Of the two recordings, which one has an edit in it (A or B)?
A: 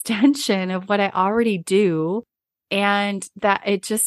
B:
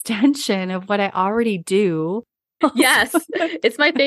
B